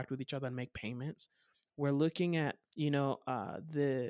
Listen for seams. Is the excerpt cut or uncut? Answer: cut